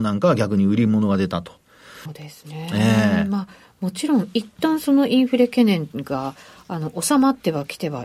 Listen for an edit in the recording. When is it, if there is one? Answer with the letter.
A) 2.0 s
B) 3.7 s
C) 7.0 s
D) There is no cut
A